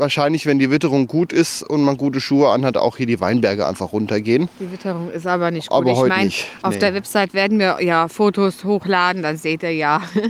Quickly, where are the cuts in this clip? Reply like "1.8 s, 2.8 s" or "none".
none